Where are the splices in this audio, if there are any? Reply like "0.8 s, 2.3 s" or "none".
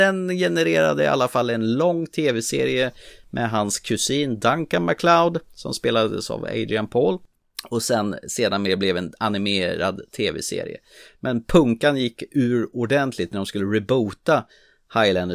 none

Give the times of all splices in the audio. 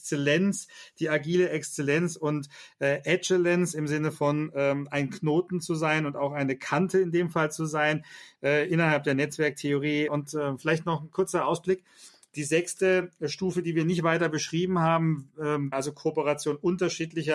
10.1 s, 15.7 s

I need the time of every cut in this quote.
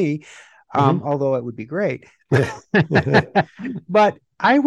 none

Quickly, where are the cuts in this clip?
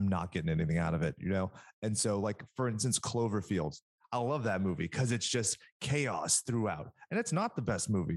none

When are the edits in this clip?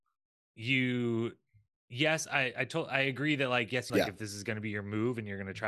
3.9 s

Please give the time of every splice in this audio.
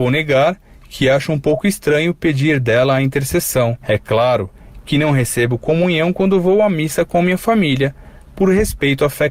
3.8 s

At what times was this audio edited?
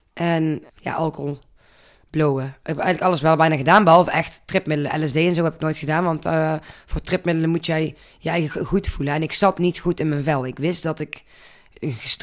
none

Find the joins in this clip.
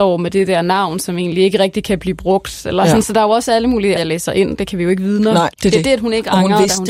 4.0 s, 5.5 s

